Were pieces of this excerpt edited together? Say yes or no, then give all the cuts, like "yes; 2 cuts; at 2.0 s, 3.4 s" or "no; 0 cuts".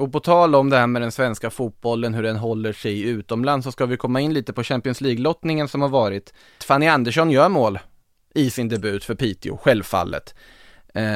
yes; 1 cut; at 6.6 s